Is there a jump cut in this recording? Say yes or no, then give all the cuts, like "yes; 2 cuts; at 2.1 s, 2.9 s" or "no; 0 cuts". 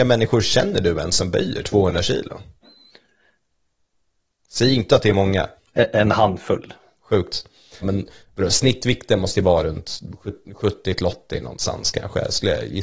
yes; 2 cuts; at 5.6 s, 7.8 s